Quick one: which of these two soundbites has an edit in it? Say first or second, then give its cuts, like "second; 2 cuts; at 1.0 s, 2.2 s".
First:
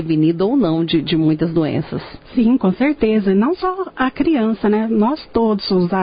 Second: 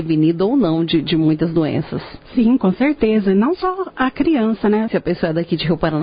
second; 1 cut; at 4.9 s